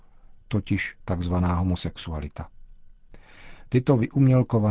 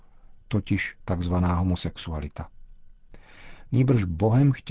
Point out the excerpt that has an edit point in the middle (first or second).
second